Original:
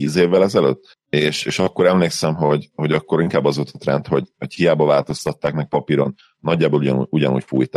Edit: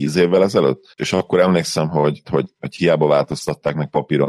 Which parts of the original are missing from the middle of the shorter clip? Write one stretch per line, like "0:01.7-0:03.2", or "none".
0:01.0-0:01.4
0:02.7-0:04.0